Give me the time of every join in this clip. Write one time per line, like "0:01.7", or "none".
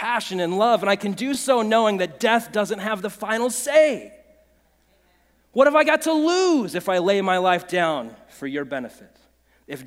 none